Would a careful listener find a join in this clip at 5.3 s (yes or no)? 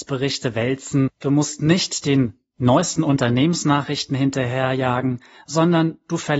no